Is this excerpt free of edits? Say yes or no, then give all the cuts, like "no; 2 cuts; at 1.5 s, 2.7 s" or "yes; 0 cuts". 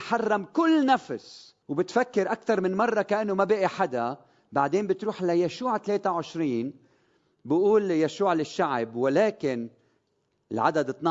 no; 1 cut; at 1.6 s